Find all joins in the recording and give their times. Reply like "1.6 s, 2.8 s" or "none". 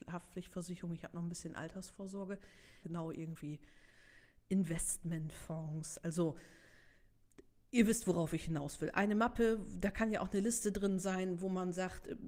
2.8 s